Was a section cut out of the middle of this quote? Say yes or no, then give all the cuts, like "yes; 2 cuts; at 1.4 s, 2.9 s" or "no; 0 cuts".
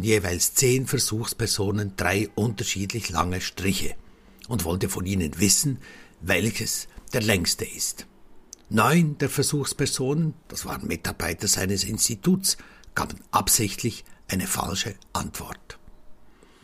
yes; 1 cut; at 10.4 s